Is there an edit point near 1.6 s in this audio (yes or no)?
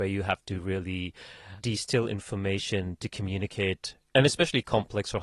yes